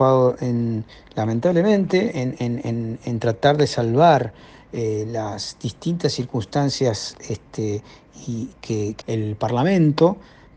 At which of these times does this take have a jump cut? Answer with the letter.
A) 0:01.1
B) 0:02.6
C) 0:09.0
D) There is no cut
C